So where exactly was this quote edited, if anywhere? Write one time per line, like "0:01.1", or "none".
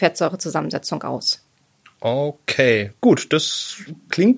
none